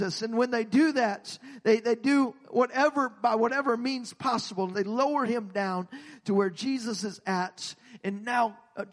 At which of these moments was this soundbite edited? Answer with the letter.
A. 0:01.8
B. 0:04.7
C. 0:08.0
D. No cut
B